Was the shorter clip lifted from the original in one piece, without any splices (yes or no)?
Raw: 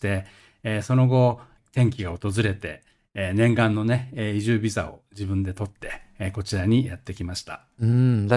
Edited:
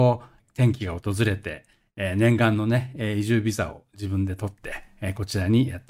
yes